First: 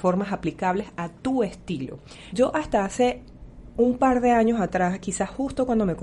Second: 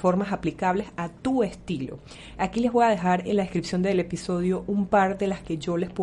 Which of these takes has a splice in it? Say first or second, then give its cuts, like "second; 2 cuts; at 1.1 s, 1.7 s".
first; 1 cut; at 2.3 s